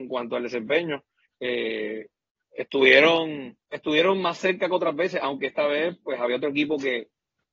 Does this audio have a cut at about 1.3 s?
yes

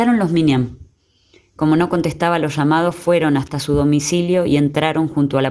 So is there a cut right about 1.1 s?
no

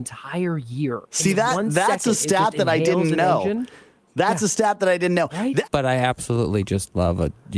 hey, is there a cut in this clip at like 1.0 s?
yes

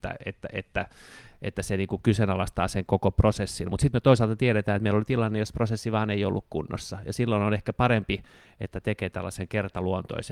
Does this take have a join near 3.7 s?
no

